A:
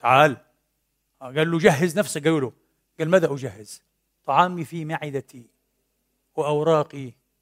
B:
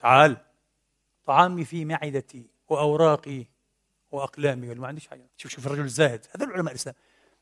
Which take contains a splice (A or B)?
B